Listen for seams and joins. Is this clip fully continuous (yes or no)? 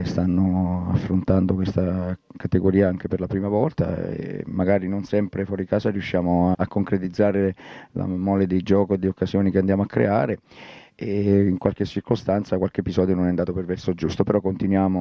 no